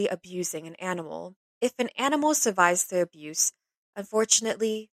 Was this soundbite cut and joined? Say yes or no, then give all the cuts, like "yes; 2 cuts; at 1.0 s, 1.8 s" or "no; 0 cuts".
yes; 1 cut; at 1.4 s